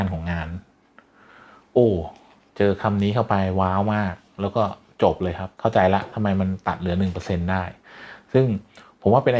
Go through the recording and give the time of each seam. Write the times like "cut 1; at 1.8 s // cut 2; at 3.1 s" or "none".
cut 1; at 5.5 s

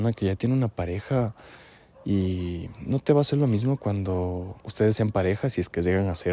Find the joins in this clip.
cut 1; at 4.6 s

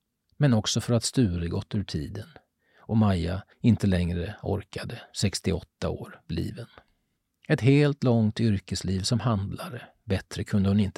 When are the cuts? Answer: none

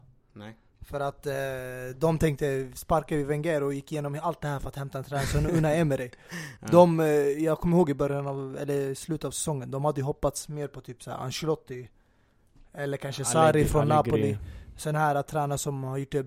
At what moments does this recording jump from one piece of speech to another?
none

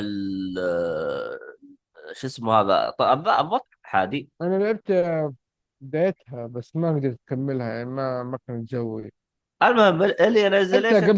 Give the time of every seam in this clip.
cut 1; at 3.7 s

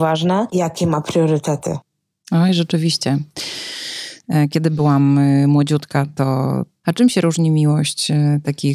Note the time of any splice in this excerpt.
cut 1; at 4.2 s // cut 2; at 6.8 s

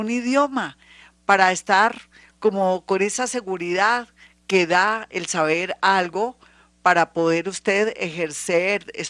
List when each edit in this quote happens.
none

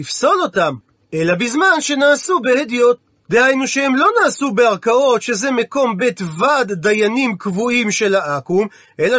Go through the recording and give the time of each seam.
none

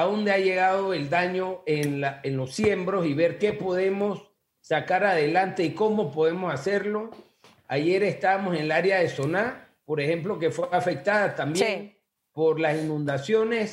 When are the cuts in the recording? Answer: none

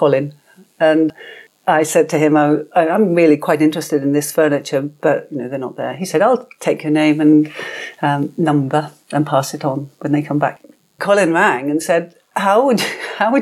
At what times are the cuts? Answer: cut 1; at 11.0 s

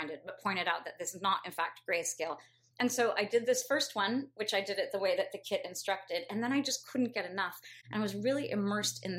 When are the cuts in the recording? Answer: cut 1; at 2.7 s

